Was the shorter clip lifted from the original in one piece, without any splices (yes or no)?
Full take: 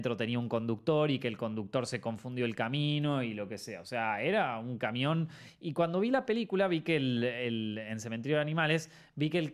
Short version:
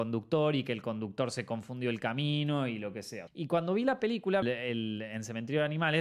no